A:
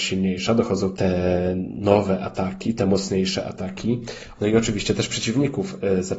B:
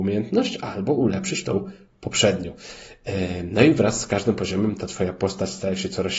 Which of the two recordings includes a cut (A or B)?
A